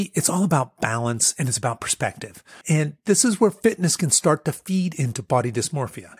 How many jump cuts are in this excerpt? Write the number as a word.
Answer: one